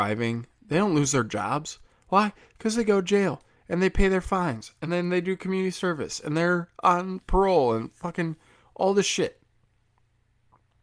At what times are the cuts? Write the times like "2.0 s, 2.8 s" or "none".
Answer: none